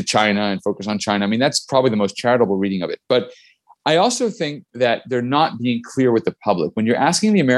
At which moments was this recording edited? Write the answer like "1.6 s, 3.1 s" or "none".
none